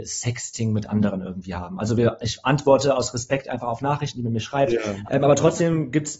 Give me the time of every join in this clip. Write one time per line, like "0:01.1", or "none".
0:05.0